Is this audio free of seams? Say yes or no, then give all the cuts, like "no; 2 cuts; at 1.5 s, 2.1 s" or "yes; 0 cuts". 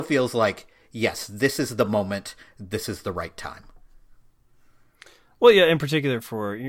yes; 0 cuts